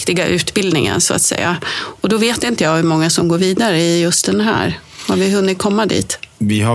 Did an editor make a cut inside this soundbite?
no; 0 cuts

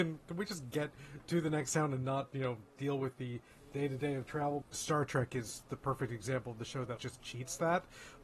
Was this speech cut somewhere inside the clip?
yes; 2 cuts; at 4.6 s, 7.0 s

